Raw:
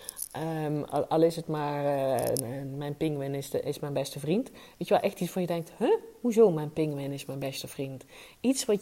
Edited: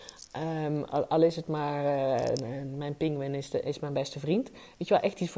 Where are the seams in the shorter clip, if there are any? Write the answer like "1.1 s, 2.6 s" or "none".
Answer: none